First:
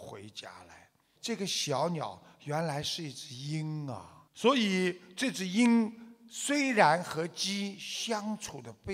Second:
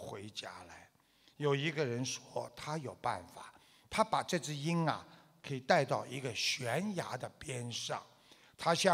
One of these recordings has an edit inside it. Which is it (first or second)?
first